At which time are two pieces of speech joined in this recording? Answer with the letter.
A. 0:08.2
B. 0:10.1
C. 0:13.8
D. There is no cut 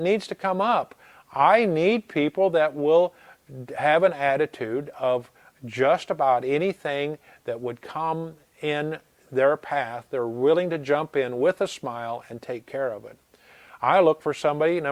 D